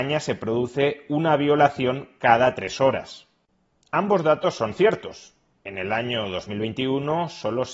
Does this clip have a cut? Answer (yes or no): no